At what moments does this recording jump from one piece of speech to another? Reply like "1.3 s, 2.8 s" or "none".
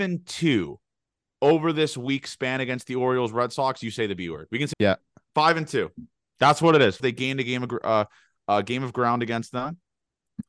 4.7 s, 7.0 s